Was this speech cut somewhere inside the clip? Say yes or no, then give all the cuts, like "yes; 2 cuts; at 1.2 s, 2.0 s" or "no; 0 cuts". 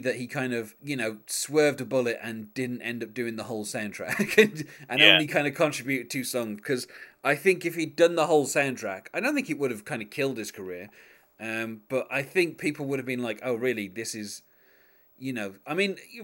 no; 0 cuts